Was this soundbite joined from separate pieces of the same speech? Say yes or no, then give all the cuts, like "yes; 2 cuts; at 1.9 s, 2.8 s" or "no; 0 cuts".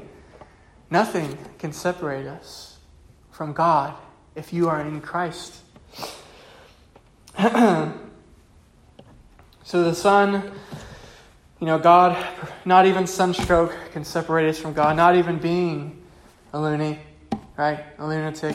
no; 0 cuts